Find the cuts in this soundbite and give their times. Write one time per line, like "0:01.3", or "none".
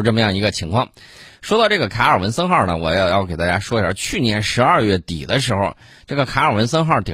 none

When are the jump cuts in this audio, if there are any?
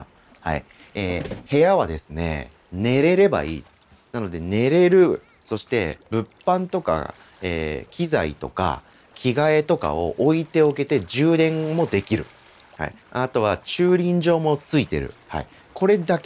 0:13.0

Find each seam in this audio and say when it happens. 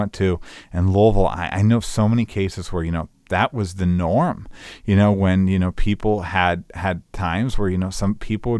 none

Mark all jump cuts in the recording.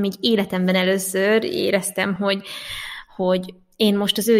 none

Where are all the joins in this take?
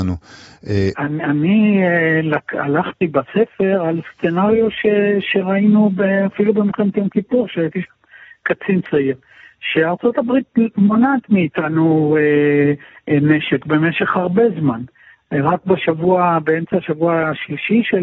0:00.9

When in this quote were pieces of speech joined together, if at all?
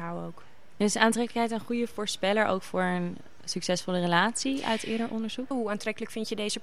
0:05.5

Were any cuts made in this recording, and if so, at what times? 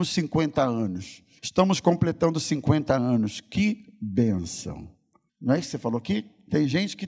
0:01.4
0:05.3

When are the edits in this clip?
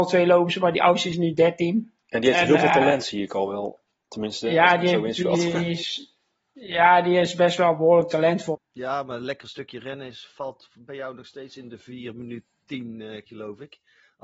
0:08.5
0:13.3

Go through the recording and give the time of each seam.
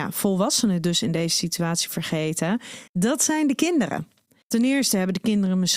0:02.9
0:04.4

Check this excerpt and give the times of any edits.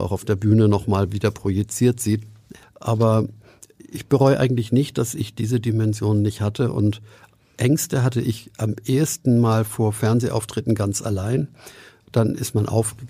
0:02.6

